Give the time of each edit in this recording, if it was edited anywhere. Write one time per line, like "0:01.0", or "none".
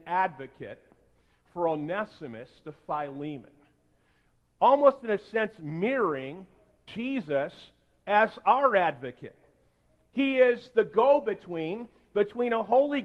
0:06.9